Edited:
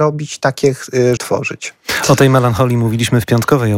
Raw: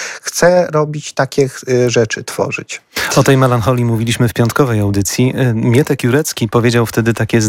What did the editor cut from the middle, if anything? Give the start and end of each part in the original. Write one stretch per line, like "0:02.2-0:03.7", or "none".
0:01.9-0:02.2